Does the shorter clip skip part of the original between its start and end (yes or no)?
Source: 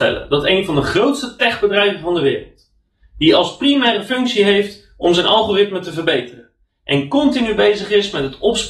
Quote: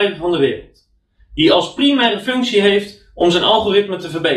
no